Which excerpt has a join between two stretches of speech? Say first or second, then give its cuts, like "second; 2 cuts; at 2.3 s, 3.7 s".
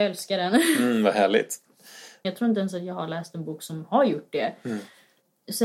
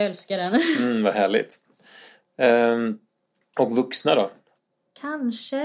first; 1 cut; at 2.2 s